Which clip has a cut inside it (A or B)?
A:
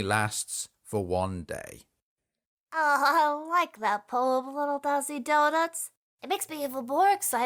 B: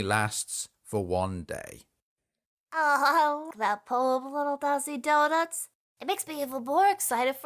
B